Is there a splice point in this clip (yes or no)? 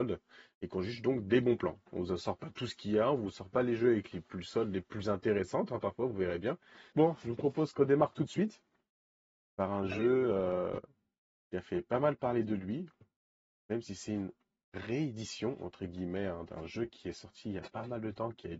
yes